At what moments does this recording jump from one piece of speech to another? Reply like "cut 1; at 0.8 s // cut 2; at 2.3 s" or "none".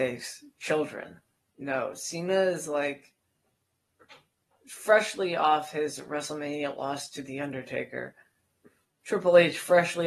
cut 1; at 1.4 s